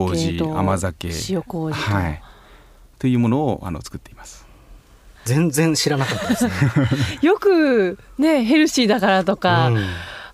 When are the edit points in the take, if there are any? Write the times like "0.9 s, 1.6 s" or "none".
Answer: 5.2 s